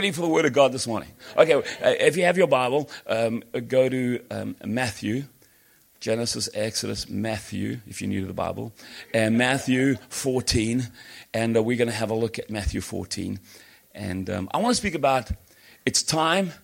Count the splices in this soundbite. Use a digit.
0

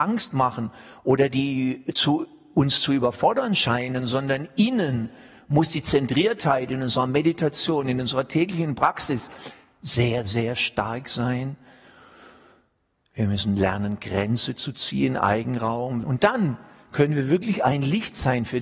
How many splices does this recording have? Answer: 1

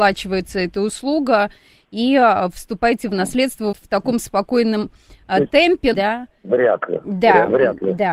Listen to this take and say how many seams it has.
2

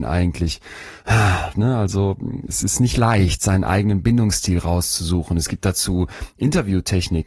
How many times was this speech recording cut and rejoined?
1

